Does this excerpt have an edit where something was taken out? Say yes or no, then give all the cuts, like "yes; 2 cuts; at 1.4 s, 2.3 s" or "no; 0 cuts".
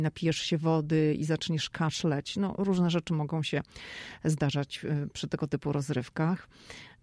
yes; 1 cut; at 5.1 s